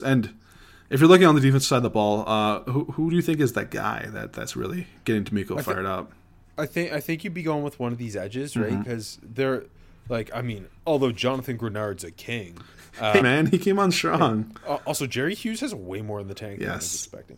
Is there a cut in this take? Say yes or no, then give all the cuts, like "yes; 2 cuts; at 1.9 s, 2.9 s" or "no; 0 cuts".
yes; 1 cut; at 13.2 s